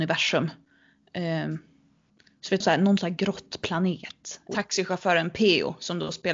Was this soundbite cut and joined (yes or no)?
yes